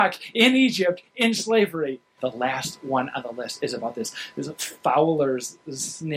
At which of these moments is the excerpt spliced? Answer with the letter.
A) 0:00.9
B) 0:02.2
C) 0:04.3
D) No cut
B